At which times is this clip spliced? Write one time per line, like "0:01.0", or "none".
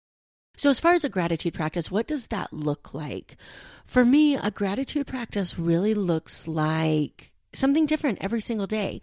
none